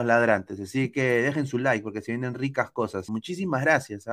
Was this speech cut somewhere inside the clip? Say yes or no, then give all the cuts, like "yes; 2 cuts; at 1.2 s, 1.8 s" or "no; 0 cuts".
yes; 1 cut; at 3.1 s